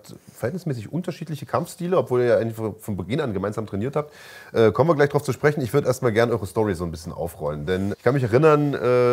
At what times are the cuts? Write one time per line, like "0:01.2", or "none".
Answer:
0:07.9